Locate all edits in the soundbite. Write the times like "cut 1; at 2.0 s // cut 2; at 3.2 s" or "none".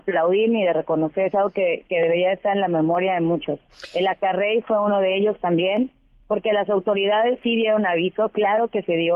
none